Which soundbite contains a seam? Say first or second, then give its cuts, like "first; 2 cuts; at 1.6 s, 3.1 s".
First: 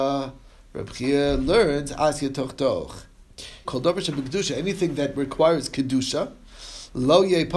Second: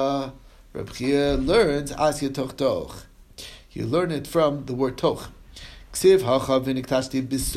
first; 1 cut; at 3.6 s